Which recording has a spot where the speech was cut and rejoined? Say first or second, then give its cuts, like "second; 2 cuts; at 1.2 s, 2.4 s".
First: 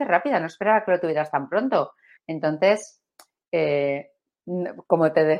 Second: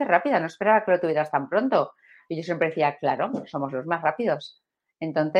first; 1 cut; at 2.2 s